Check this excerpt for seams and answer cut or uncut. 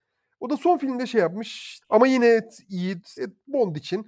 cut